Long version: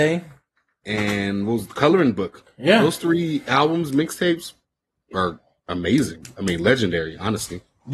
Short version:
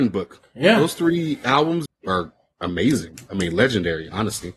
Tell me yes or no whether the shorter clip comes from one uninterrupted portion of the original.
no